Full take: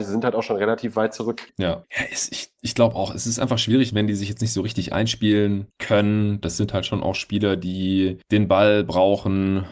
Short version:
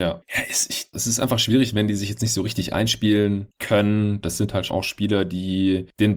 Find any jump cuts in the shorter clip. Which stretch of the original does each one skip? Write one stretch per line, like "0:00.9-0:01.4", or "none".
0:02.6-0:03.1
0:06.9-0:07.0